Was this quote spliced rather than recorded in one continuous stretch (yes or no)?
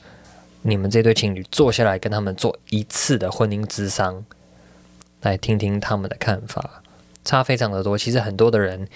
no